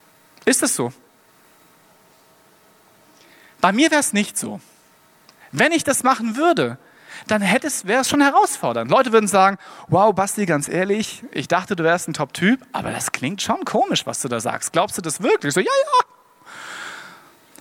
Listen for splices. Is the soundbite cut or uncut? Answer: uncut